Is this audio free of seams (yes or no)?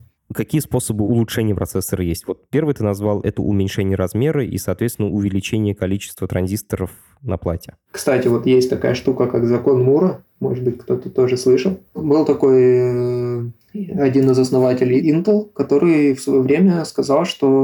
yes